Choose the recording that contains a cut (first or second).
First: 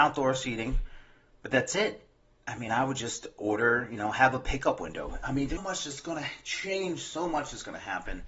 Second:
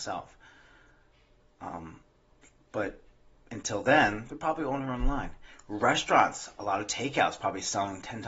first